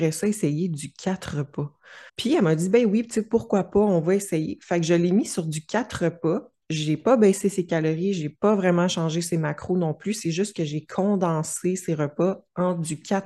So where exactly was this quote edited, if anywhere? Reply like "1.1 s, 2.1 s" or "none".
2.1 s